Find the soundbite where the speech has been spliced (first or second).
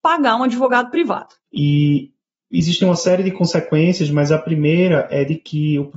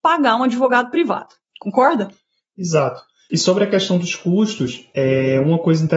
first